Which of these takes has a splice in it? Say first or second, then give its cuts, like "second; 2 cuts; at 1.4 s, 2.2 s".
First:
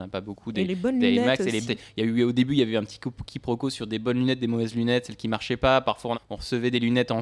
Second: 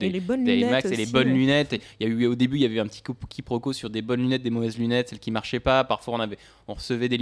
first; 2 cuts; at 1.7 s, 6.1 s